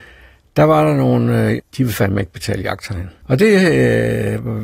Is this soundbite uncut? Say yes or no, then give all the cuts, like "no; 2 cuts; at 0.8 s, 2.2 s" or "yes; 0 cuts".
no; 2 cuts; at 1.6 s, 3.2 s